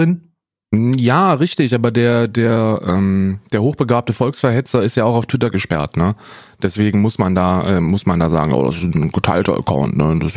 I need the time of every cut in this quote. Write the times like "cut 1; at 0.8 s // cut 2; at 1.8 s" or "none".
none

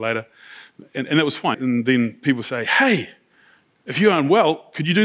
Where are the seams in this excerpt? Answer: cut 1; at 1.5 s

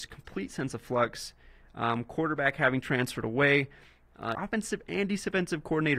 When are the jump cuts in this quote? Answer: cut 1; at 4.3 s

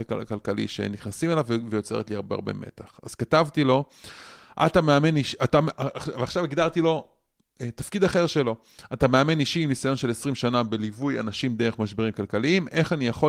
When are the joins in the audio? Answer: none

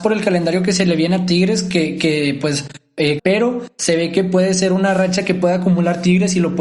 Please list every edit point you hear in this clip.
cut 1; at 3.2 s

